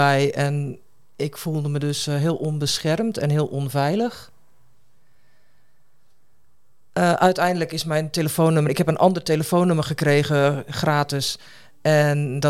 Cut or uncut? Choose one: uncut